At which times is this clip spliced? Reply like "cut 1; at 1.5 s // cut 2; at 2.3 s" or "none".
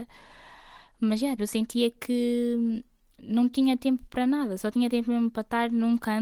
cut 1; at 1.4 s

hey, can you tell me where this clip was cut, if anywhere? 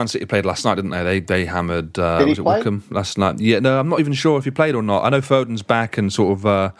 none

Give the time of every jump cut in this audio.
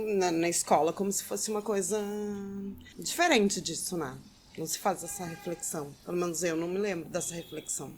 none

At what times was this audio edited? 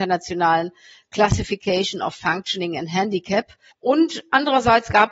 cut 1; at 3.7 s

